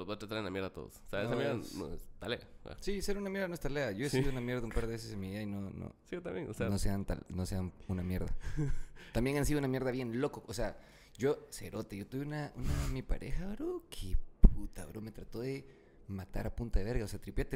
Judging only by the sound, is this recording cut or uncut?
uncut